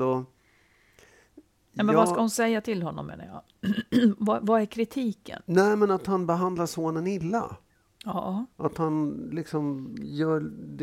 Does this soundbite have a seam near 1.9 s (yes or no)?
no